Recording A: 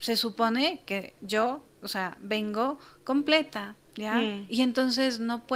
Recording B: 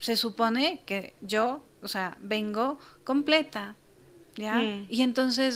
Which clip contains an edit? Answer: A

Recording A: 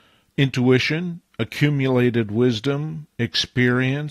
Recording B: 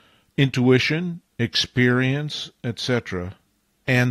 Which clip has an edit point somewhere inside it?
B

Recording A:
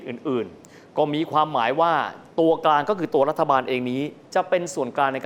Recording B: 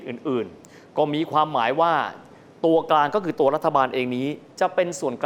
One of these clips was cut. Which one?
A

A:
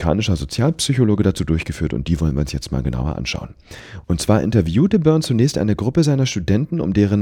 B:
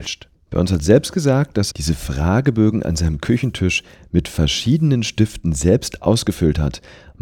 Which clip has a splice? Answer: B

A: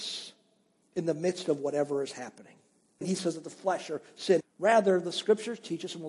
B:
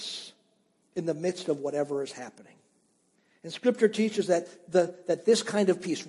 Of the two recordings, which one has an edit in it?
A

